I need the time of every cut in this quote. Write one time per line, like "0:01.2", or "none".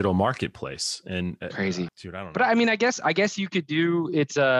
0:01.9